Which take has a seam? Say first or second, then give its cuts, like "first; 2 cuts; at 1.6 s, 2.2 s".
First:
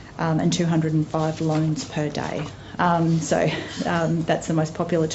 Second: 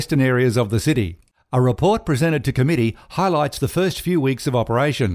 first; 1 cut; at 2.8 s